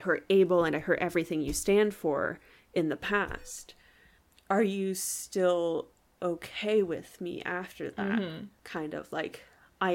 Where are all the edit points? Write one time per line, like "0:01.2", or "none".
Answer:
none